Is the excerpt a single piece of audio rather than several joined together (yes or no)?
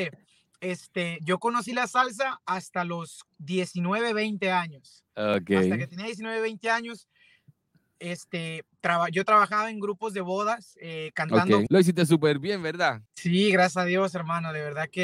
no